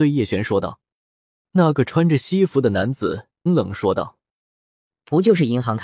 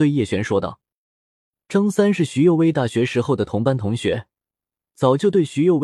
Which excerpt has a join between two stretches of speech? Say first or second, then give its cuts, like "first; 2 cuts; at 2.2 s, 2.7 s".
first; 2 cuts; at 1.4 s, 3.5 s